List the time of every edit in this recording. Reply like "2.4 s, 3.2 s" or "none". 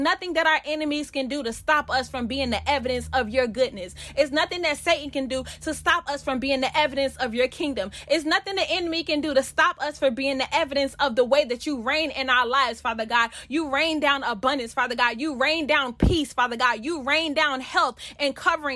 none

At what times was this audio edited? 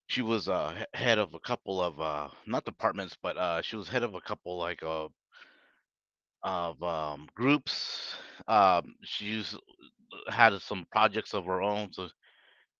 none

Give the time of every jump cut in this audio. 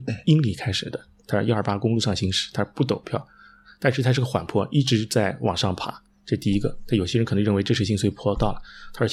none

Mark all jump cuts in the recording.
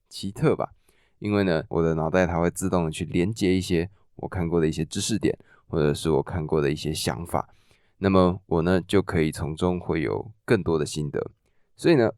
1.7 s

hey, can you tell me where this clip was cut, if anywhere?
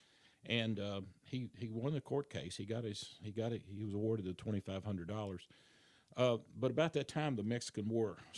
none

